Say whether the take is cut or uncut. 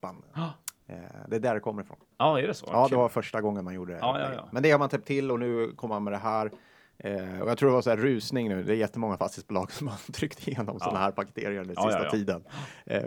uncut